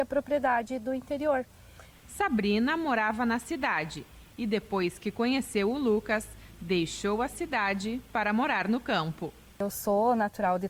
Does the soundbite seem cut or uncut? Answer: cut